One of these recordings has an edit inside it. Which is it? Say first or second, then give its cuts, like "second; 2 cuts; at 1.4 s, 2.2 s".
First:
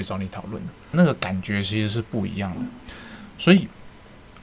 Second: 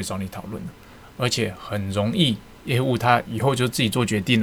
first; 1 cut; at 0.9 s